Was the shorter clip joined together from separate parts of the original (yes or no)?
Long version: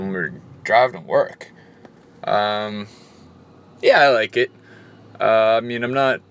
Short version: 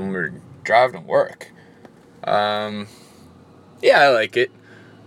no